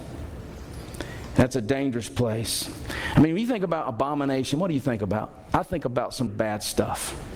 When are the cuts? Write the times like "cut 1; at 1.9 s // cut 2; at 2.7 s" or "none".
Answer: cut 1; at 6.3 s